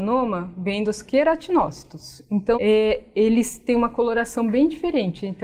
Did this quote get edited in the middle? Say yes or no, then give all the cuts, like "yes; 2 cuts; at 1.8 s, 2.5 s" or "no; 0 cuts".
yes; 1 cut; at 2.5 s